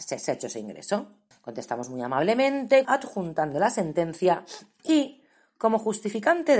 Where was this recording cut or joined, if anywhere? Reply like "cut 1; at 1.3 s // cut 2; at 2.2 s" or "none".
cut 1; at 1.3 s // cut 2; at 2.8 s